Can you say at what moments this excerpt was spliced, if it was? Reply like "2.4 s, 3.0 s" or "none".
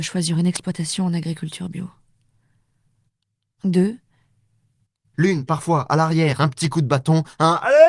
5.1 s, 6.4 s